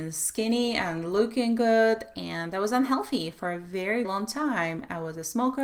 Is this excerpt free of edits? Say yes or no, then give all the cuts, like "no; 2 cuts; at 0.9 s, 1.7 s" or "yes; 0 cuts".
no; 1 cut; at 4.0 s